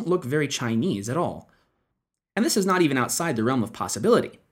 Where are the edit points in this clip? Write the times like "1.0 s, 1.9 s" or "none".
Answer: none